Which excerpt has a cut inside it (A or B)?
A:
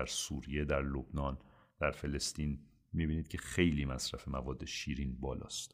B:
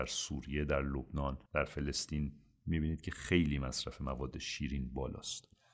B